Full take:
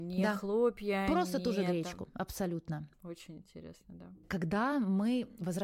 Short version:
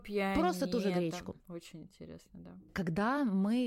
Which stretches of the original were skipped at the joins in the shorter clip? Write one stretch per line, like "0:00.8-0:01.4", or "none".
0:02.1-0:02.9